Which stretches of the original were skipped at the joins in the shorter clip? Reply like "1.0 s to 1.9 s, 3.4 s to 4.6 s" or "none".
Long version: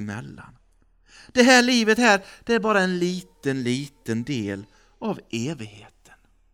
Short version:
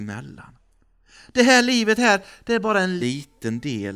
3.0 s to 3.6 s

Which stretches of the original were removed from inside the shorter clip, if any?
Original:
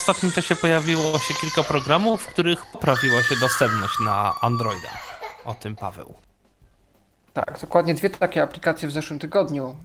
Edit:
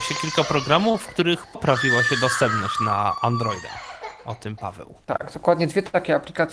6.2 s to 7.3 s

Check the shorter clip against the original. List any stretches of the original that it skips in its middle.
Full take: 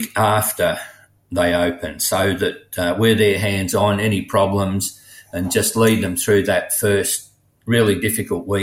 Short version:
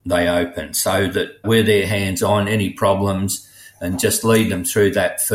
2.7 s to 3.0 s

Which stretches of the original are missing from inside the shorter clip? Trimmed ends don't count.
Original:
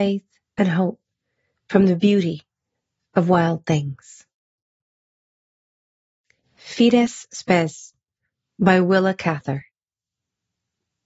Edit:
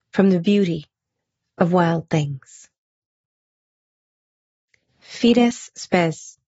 none

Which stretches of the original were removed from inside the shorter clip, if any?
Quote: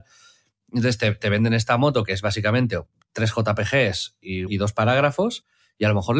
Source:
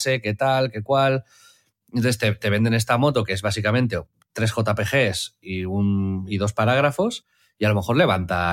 5.7 s to 6.3 s

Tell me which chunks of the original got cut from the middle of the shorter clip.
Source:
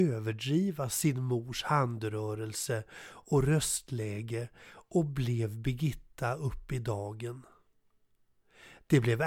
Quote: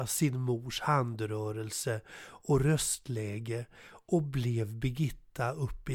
none

